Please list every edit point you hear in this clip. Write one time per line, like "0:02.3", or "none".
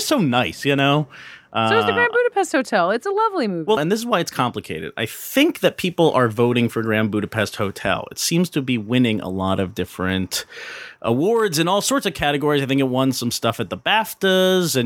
0:03.8